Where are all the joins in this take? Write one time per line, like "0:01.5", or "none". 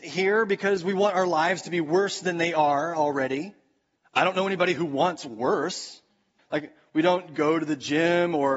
0:04.0
0:06.4